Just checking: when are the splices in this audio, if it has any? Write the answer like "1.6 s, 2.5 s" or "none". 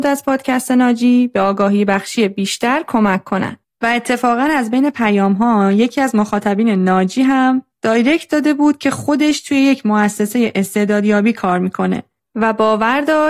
3.6 s

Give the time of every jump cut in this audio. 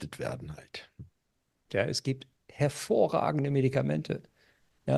1.7 s

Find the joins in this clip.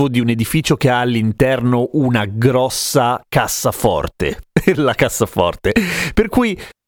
none

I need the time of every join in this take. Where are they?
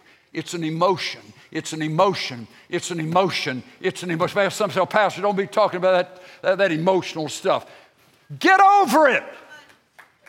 none

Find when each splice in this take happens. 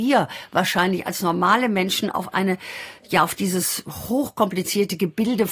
none

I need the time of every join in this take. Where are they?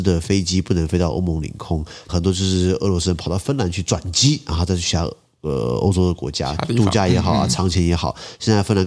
2.1 s

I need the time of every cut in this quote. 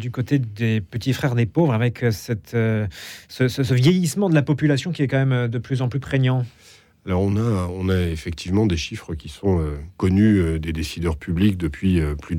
none

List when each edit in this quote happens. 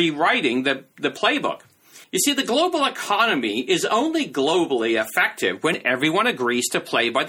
2.0 s

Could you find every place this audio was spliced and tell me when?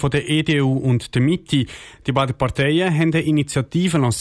none

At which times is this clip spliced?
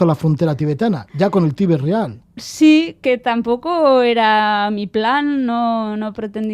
none

